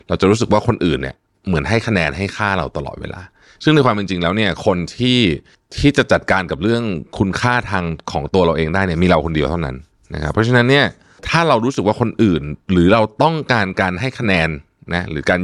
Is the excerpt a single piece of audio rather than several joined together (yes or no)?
yes